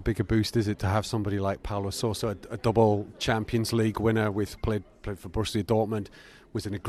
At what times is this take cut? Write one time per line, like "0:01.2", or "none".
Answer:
0:04.6

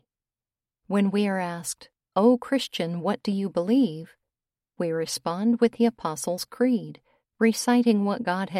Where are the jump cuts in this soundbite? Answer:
none

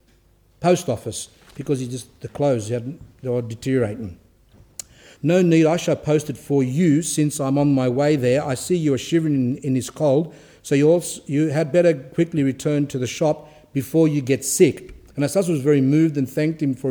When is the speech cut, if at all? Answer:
0:05.2

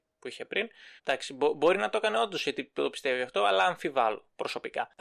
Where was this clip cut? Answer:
0:01.0

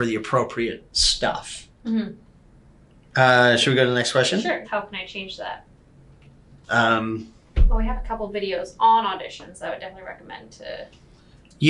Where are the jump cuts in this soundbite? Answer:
0:04.6
0:06.6

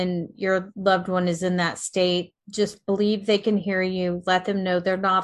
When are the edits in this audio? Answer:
none

